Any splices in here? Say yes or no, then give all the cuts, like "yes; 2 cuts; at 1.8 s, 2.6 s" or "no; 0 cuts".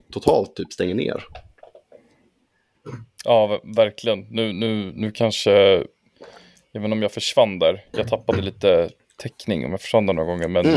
no; 0 cuts